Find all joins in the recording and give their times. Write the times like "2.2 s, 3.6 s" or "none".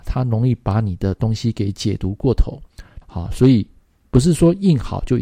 3.0 s